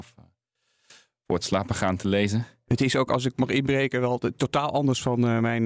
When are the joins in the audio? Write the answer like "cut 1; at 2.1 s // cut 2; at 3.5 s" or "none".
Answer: none